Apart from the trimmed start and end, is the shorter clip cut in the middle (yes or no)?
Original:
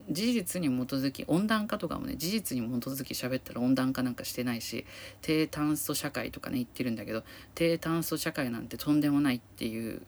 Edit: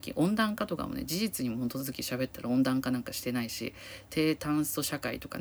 no